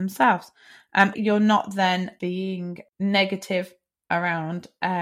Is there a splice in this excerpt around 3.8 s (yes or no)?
no